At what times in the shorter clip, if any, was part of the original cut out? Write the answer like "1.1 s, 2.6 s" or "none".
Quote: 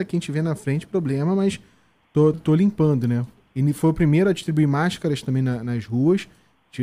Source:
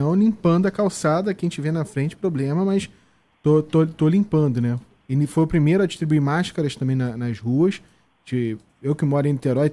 2.3 s